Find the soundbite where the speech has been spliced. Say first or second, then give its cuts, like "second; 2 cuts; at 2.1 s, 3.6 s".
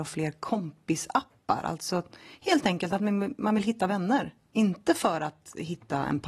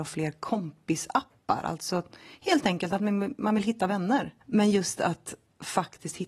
second; 1 cut; at 4.4 s